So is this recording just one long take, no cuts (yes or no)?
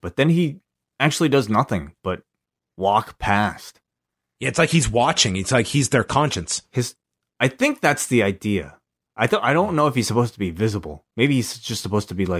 yes